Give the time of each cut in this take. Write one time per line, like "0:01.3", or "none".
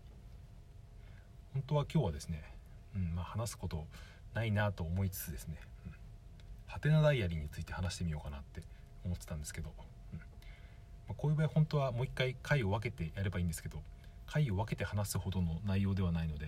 none